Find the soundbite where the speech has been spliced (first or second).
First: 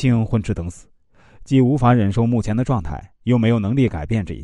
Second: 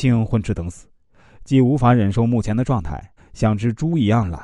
second